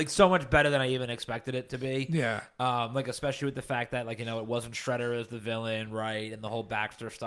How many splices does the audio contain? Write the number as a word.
zero